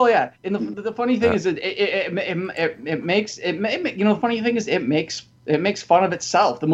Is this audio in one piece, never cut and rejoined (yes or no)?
yes